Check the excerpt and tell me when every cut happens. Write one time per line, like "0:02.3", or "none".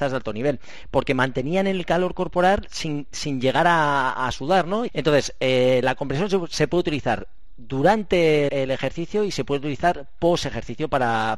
0:04.9
0:08.5